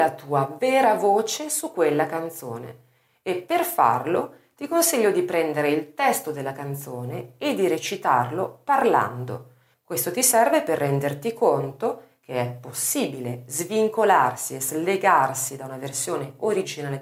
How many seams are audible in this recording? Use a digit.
1